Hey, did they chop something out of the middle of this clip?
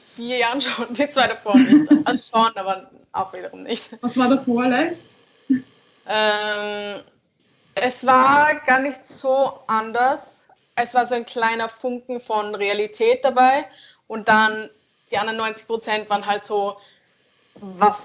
yes; 1 cut; at 10.7 s

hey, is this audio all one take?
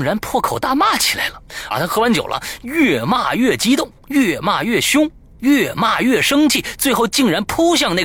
no; 1 cut; at 1.7 s

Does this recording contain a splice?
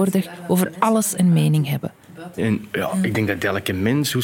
yes; 1 cut; at 2.4 s

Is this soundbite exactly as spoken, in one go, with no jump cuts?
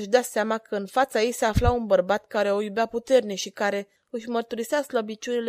no; 1 cut; at 4.0 s

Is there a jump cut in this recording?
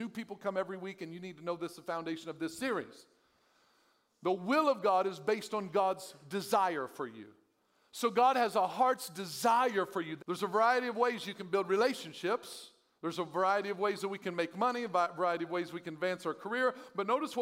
yes; 1 cut; at 10.2 s

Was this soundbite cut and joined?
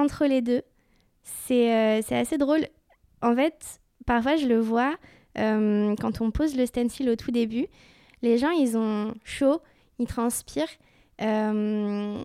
no; 0 cuts

